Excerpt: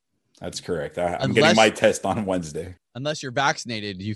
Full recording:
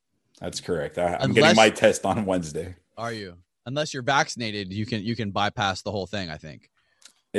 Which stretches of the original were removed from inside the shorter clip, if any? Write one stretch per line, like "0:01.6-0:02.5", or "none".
0:02.8-0:03.5

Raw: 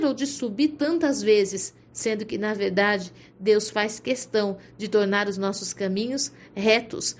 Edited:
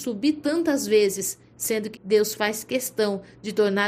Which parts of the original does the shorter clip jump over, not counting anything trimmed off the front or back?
0:02.3-0:03.3

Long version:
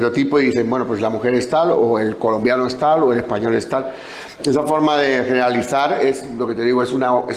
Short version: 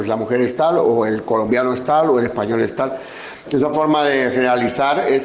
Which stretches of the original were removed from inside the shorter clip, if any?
none

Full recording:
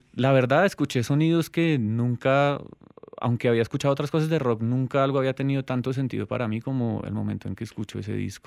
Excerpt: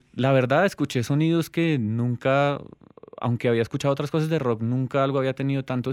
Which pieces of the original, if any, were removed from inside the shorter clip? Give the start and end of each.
none

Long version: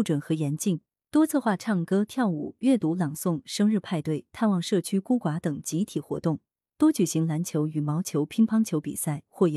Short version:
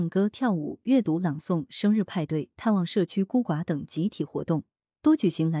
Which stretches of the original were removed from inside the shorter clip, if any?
none

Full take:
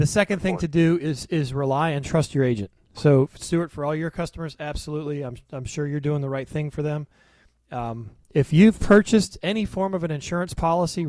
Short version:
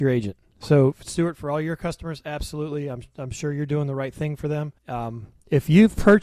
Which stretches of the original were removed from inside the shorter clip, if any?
0:07.1-0:07.6

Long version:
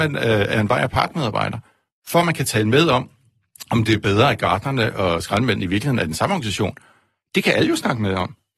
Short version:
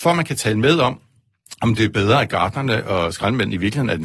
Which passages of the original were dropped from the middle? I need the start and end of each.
none

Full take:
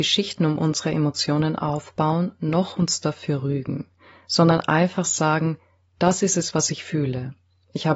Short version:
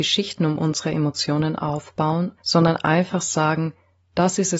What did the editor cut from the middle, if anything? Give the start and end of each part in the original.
0:02.4-0:04.2

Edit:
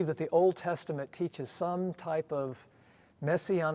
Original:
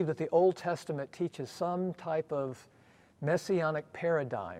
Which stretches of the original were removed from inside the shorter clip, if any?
none

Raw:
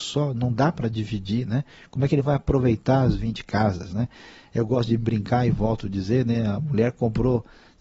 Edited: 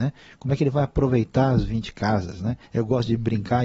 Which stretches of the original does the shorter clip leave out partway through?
0:04.2-0:04.5

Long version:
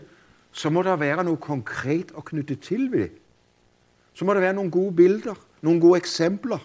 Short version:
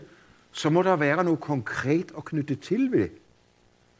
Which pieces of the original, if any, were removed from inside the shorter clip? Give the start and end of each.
none

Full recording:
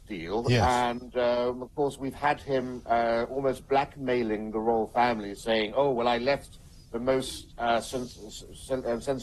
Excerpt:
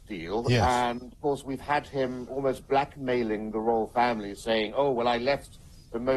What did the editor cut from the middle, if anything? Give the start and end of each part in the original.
0:01.1-0:01.7
0:02.8-0:03.3

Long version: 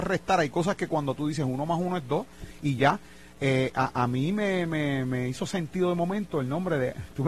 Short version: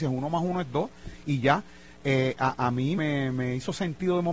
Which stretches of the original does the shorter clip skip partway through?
0:04.3-0:04.7

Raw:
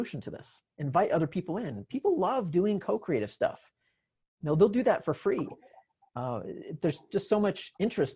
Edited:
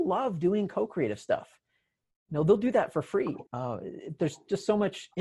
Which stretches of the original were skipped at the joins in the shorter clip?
0:05.6-0:06.1

